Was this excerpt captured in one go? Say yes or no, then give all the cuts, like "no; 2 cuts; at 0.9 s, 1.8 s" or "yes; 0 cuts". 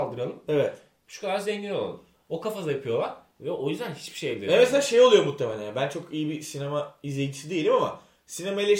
yes; 0 cuts